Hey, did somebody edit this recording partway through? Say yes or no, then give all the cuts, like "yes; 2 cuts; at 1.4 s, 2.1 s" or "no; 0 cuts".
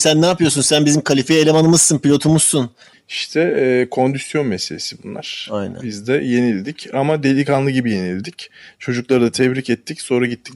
yes; 1 cut; at 2.9 s